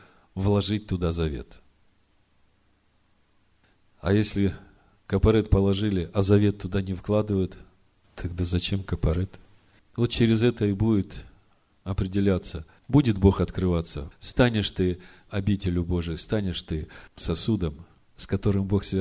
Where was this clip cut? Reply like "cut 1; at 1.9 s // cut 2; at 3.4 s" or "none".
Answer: cut 1; at 9.8 s // cut 2; at 12.8 s // cut 3; at 14.1 s